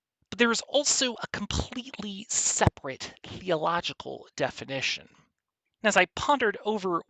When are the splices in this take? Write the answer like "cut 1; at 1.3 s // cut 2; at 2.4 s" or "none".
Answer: cut 1; at 5.7 s